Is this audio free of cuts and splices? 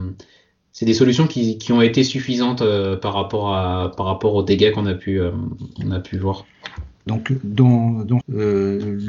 no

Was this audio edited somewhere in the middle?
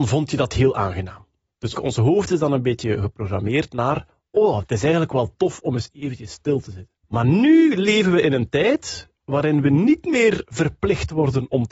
yes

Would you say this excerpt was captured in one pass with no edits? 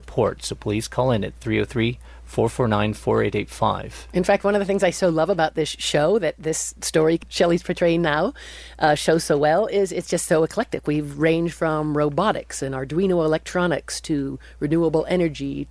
yes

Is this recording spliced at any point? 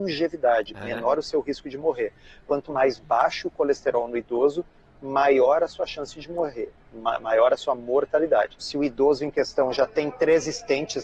yes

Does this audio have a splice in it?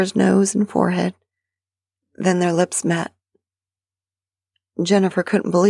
no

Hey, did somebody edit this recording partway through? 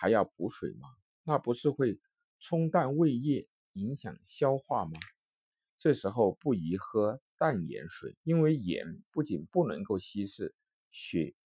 yes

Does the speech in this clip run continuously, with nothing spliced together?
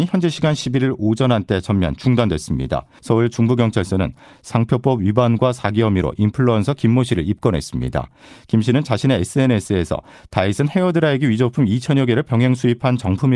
no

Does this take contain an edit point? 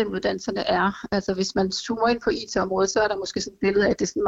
no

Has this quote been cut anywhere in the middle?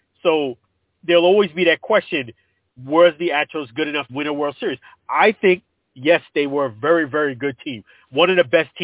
yes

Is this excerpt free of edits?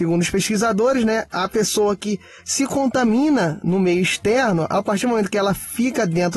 yes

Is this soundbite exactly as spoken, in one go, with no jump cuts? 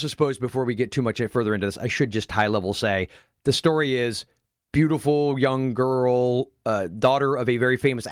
yes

